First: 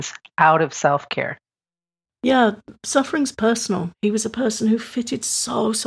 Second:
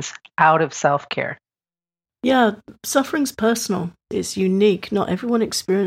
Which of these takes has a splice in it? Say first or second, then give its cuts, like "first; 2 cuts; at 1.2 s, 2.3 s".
first; 1 cut; at 3.9 s